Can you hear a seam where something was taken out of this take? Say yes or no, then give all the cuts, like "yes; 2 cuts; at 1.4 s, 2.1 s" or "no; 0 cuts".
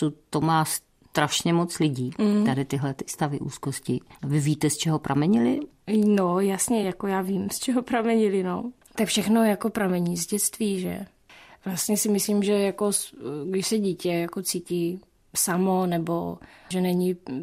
no; 0 cuts